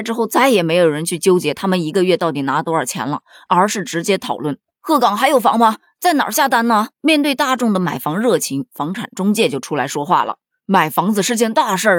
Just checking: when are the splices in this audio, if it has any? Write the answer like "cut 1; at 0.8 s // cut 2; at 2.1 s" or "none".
cut 1; at 6.9 s